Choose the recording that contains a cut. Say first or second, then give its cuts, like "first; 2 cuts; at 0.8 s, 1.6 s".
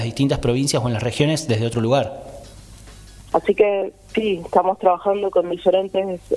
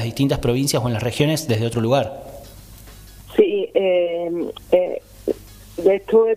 first; 1 cut; at 3.3 s